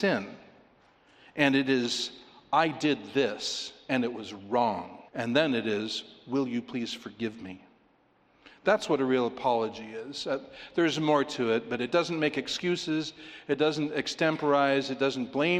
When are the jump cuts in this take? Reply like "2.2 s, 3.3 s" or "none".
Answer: 5.1 s